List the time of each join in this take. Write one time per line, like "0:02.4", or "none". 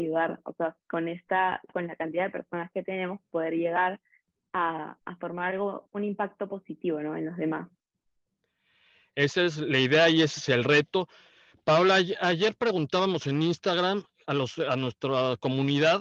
none